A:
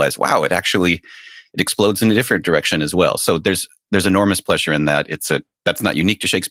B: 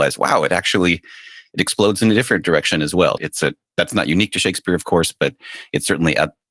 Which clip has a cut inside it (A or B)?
B